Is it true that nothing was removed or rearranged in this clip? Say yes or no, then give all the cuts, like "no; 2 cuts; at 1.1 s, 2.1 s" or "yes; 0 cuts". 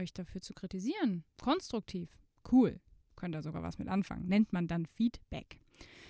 no; 1 cut; at 1.3 s